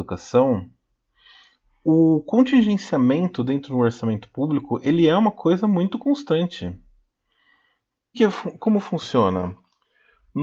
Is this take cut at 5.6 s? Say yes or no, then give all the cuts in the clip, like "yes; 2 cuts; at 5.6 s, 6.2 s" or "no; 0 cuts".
no; 1 cut; at 8.1 s